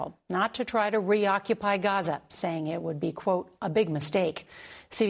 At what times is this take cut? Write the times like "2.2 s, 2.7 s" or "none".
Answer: none